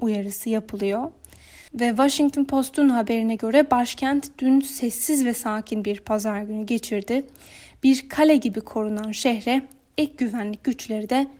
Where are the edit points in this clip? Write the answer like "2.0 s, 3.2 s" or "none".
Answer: none